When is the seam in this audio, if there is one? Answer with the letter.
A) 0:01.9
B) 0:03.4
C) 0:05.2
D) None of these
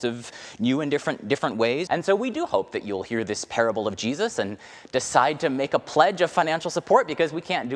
A